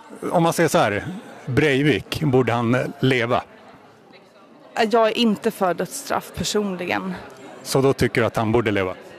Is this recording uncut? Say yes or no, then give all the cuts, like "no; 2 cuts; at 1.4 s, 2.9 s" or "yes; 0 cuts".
yes; 0 cuts